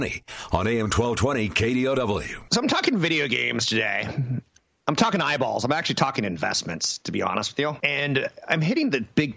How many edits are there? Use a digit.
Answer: 0